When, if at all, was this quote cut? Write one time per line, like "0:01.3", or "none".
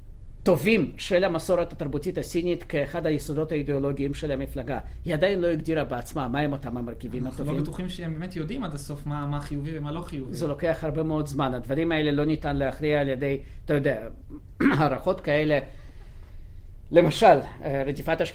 none